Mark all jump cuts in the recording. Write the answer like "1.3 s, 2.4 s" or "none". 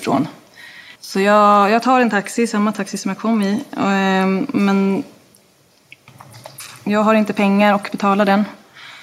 1.0 s